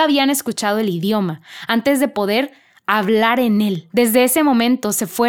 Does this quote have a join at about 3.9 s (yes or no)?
yes